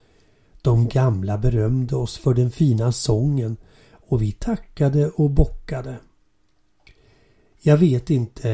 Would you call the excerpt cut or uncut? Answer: uncut